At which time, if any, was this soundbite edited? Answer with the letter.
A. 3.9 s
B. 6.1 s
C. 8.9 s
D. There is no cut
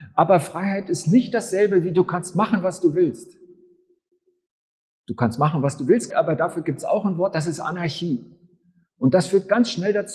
B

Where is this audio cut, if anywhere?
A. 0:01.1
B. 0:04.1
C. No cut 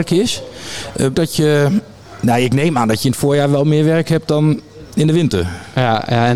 A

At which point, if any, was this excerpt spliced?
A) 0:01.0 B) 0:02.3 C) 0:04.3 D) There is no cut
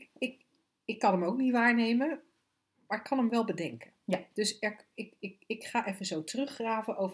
D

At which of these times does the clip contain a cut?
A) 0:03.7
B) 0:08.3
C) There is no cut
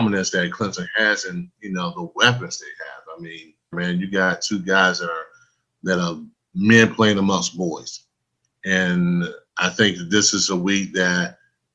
A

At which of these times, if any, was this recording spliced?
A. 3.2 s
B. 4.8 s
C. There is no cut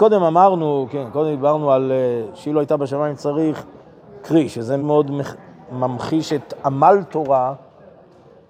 B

